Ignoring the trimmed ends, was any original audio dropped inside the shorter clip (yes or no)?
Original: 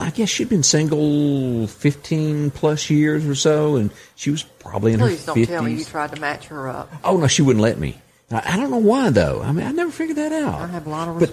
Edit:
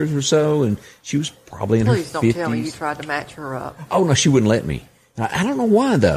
no